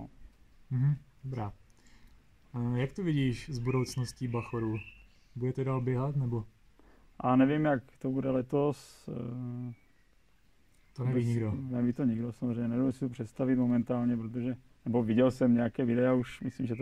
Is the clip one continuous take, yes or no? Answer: yes